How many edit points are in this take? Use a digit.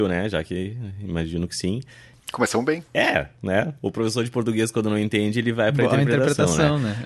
0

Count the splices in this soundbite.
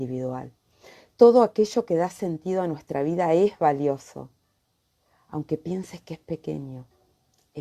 0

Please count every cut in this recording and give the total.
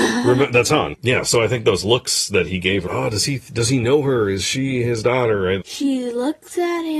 2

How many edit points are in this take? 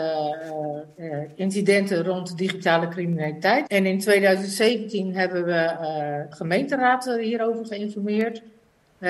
2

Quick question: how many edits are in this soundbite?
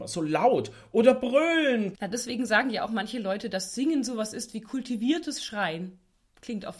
1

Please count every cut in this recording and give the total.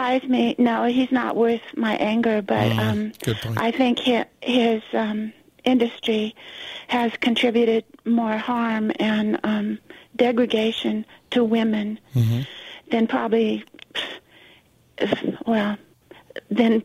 0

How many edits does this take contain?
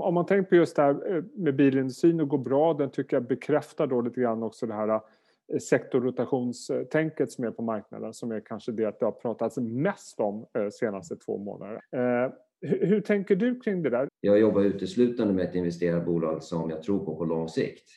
2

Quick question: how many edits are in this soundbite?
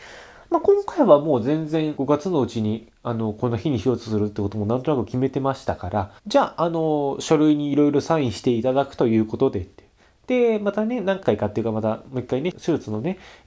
1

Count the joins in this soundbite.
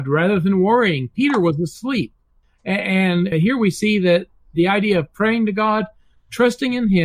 1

